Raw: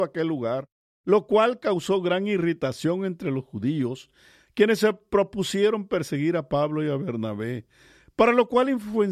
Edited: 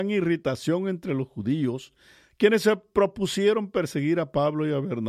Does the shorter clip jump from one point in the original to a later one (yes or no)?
no